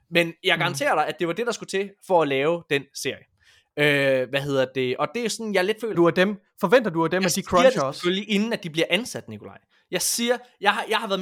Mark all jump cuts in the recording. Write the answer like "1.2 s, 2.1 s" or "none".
5.9 s